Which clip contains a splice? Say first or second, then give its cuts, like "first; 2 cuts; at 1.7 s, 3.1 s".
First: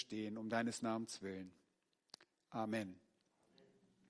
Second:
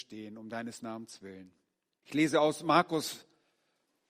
second; 1 cut; at 2.0 s